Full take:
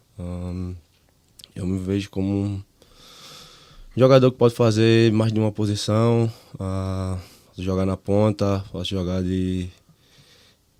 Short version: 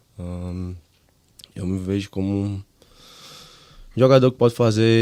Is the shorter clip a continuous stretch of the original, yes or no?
yes